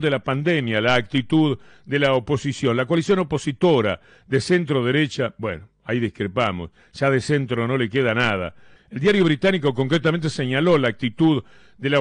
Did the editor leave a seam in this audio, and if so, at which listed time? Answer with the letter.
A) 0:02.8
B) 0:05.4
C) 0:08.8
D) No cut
C